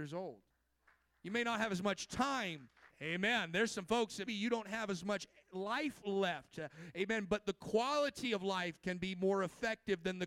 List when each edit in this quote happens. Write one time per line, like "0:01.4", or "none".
0:02.9
0:04.3